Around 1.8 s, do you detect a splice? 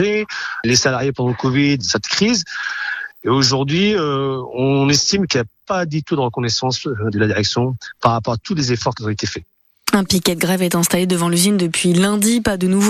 yes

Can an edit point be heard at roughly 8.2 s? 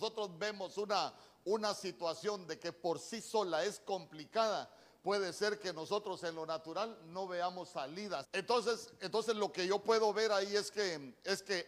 yes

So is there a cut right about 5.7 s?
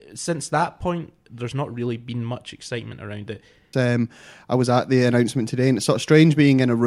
no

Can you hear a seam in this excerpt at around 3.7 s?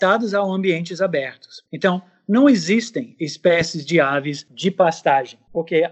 no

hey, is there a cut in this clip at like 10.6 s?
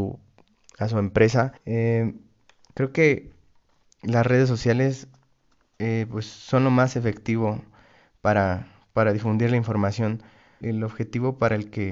yes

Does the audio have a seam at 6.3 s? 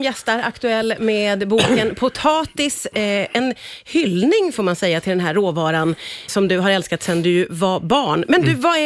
yes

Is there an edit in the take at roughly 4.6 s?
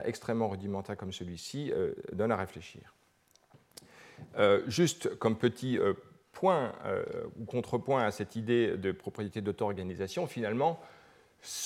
no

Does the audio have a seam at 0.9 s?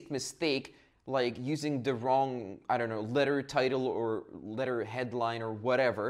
no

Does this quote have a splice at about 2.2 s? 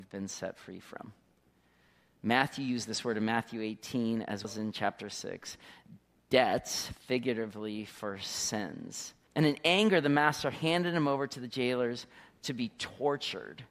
no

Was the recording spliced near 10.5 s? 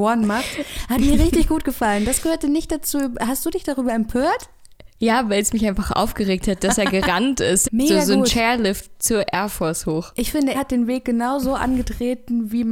yes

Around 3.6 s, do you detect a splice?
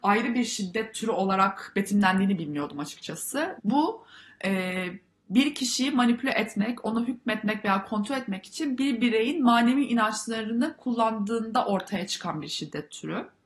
yes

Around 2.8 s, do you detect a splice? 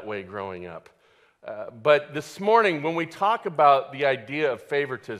no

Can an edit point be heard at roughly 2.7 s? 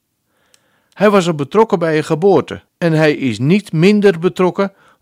yes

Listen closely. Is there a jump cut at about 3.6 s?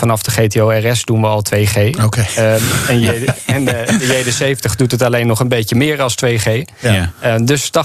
no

